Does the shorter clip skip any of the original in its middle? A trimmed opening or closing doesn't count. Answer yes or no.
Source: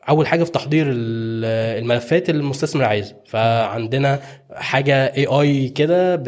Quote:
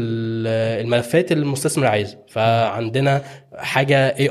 no